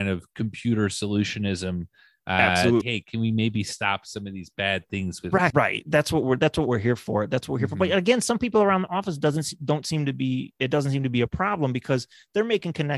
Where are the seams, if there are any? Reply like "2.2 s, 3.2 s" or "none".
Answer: 2.8 s, 5.5 s